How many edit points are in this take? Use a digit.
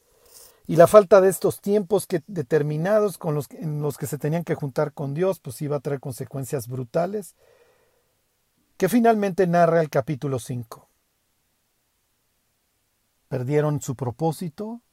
1